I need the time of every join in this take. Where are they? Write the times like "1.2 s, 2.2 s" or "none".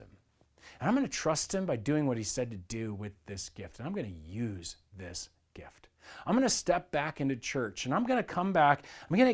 none